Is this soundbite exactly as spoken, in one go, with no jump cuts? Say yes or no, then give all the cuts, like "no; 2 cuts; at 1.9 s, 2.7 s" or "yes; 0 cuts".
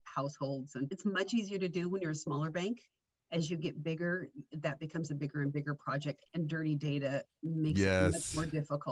no; 1 cut; at 6.2 s